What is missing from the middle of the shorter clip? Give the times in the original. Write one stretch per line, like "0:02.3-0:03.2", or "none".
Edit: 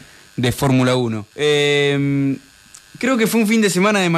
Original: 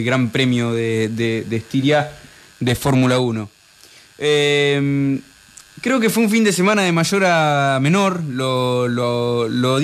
0:03.5-0:04.1

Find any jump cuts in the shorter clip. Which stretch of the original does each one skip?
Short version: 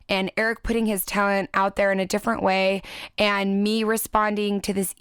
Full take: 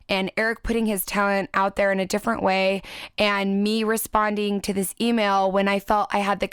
none

